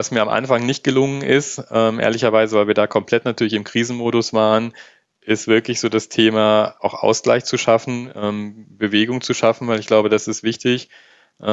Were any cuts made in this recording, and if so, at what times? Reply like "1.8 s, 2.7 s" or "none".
6.7 s